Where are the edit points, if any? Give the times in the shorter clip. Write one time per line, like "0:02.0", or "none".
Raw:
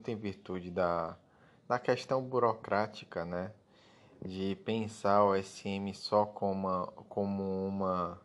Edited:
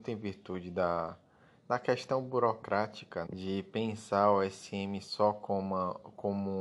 0:03.3